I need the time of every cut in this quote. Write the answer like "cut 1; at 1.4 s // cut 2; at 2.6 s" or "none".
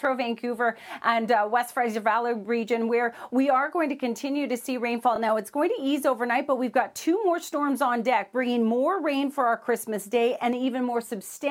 none

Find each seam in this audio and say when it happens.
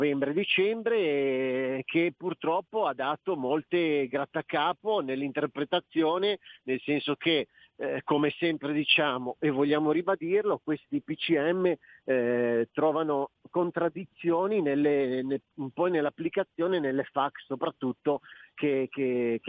none

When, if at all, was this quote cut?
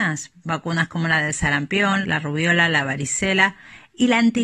cut 1; at 2.0 s

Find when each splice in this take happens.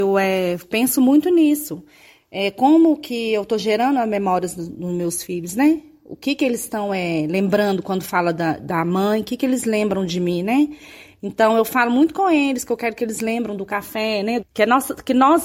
cut 1; at 14.4 s

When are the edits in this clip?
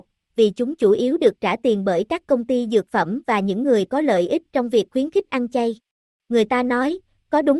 cut 1; at 6.2 s

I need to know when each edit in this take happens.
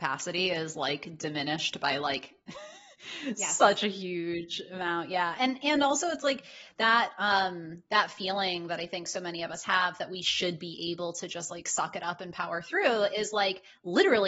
none

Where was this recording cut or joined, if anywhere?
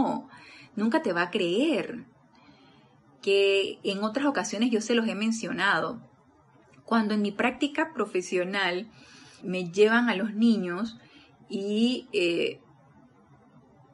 cut 1; at 9.4 s

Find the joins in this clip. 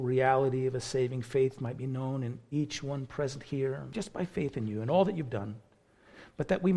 cut 1; at 3.9 s

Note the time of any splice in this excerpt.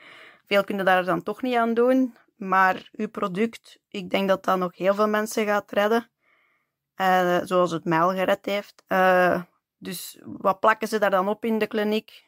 cut 1; at 8.8 s

